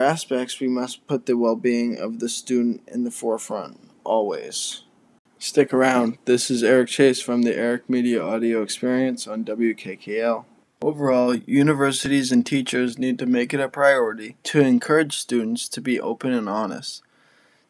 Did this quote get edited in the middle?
yes; 2 cuts; at 10.6 s, 14.4 s

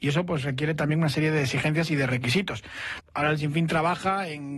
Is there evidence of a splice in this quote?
yes; 1 cut; at 3.0 s

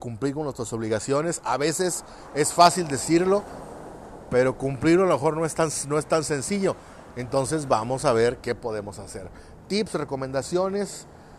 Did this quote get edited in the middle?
no; 0 cuts

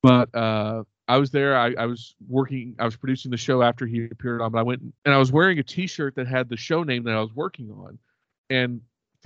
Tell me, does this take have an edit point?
yes; 1 cut; at 5.0 s

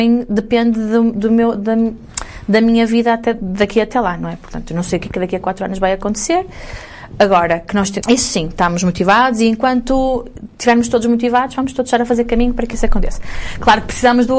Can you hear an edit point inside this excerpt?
yes; 1 cut; at 8.0 s

